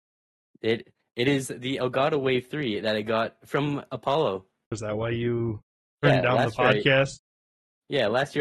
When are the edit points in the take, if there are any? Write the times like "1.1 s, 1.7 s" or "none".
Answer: 4.7 s